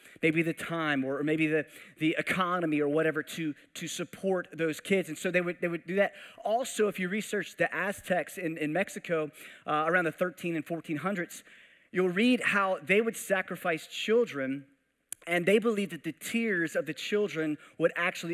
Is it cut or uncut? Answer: uncut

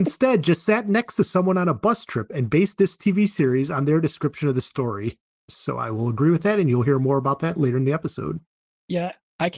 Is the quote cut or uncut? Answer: cut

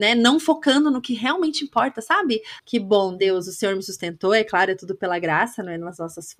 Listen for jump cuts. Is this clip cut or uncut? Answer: cut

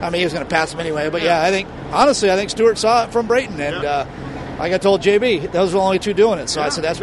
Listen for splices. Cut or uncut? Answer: uncut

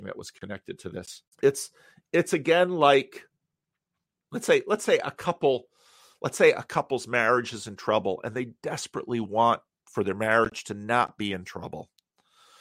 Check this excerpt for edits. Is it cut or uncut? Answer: cut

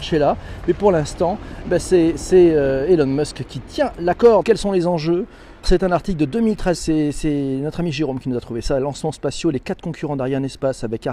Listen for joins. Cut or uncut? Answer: cut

